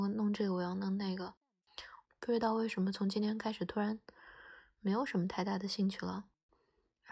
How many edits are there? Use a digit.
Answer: 1